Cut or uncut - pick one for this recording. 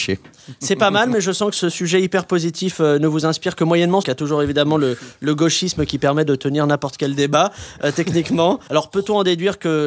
cut